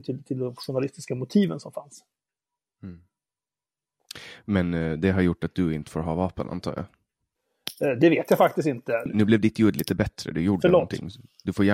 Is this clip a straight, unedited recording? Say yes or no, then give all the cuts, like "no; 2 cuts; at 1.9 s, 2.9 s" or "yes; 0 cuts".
no; 1 cut; at 9.1 s